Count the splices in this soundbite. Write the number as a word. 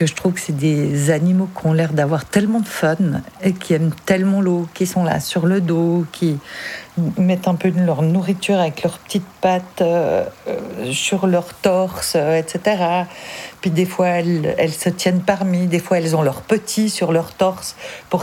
zero